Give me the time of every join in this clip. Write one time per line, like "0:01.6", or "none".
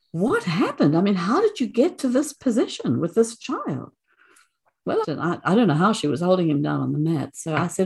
0:05.0